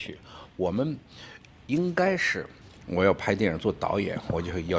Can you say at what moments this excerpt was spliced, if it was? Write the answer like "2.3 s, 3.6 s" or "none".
2.8 s